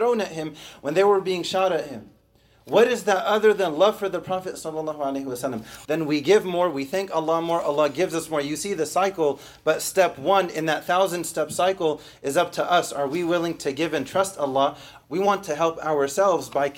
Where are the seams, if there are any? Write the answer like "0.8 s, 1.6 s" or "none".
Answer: 5.8 s, 15.0 s